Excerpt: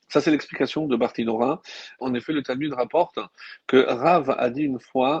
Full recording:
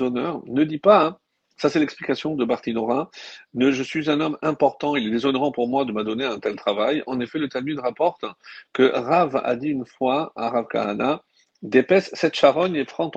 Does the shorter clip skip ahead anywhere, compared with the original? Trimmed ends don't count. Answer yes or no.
yes